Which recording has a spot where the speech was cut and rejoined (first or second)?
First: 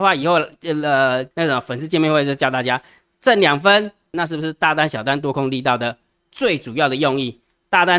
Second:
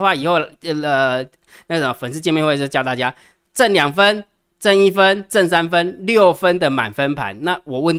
first